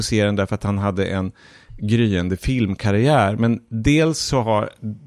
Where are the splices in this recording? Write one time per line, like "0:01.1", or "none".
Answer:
none